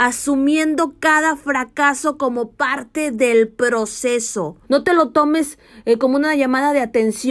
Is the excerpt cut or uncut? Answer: cut